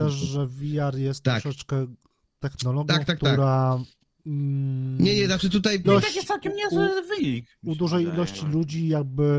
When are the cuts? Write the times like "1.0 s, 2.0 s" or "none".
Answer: 5.8 s